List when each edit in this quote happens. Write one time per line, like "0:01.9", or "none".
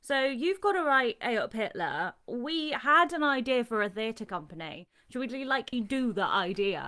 0:05.7

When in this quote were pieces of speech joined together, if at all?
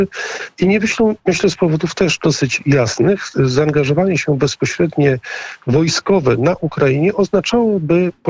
none

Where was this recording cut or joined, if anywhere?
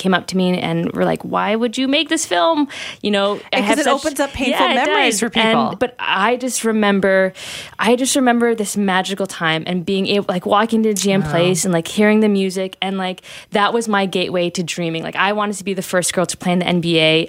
0:05.8

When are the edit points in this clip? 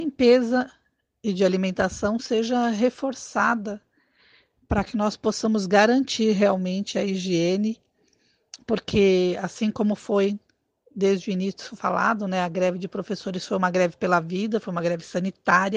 none

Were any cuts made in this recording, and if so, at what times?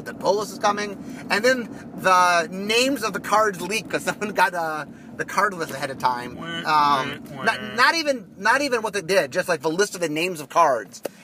none

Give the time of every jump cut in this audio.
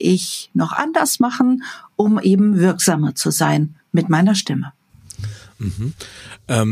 none

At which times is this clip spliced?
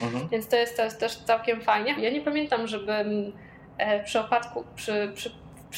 0:02.0

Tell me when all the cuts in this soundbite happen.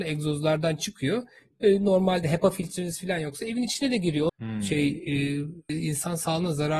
0:04.3
0:05.7

